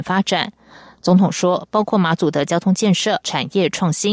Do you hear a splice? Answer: yes; 1 cut; at 3.2 s

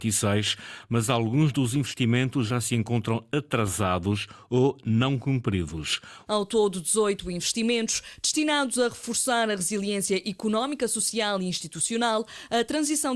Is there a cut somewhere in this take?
yes; 1 cut; at 6.3 s

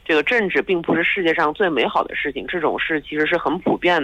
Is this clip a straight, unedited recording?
yes; 0 cuts

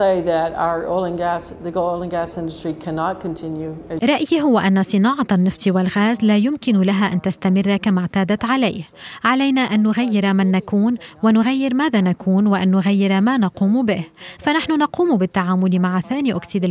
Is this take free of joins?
no; 1 cut; at 14.4 s

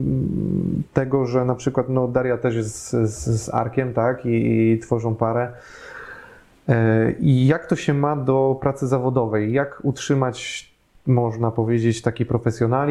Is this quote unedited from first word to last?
yes; 0 cuts

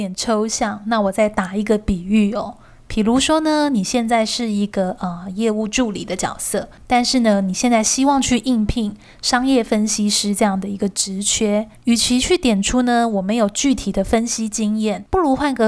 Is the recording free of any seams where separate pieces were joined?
yes; 0 cuts

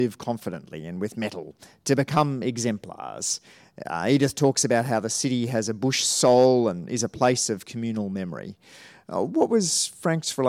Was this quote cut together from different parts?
no; 0 cuts

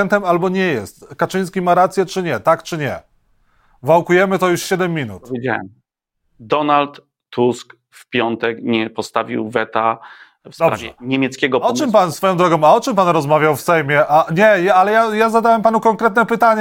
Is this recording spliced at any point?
no; 0 cuts

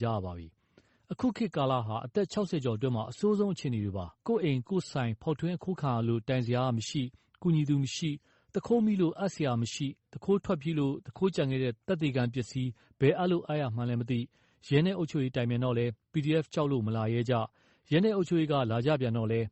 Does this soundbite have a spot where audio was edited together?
yes; 1 cut; at 4.2 s

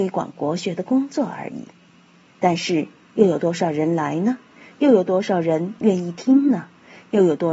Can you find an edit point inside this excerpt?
no; 0 cuts

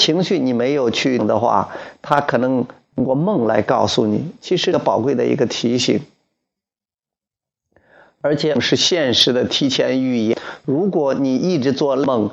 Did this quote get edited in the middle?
no; 0 cuts

